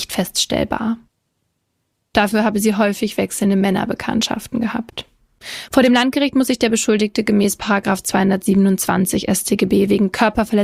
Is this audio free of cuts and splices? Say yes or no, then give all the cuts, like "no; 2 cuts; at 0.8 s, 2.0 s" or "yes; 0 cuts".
no; 1 cut; at 2.1 s